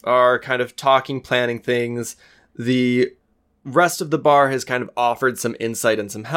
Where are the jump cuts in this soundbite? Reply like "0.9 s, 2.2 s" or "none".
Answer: none